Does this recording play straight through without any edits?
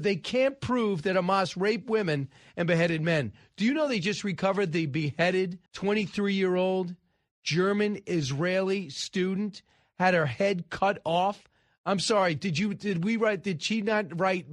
no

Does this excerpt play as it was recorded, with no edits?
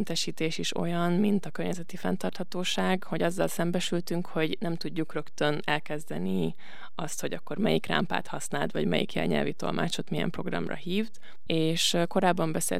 no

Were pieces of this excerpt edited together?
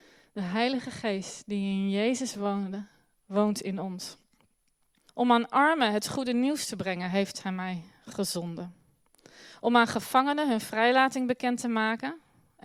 yes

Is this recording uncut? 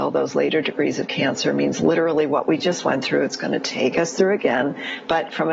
yes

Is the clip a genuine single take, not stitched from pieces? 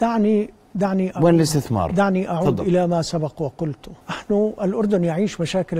no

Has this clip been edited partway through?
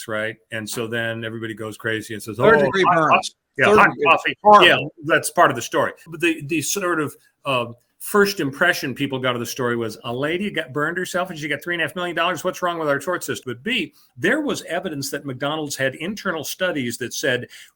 yes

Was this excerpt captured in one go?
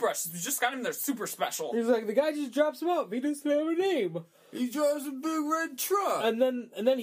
yes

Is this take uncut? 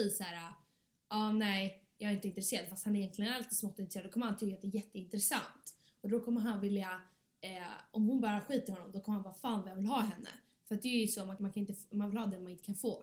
no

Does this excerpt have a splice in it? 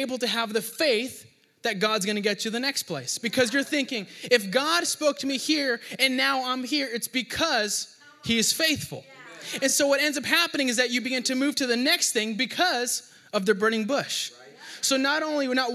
no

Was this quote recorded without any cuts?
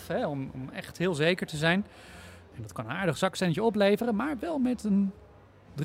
no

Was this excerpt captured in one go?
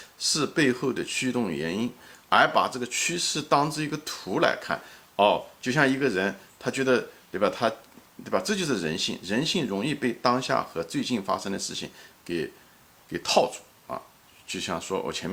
yes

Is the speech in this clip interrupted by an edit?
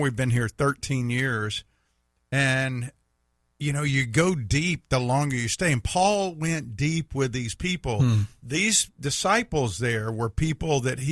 no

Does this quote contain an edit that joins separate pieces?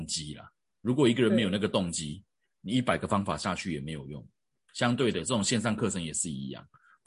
no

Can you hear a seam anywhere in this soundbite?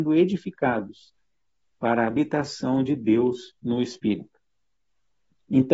no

